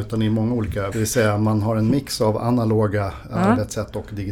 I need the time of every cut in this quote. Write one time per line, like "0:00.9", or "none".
0:00.9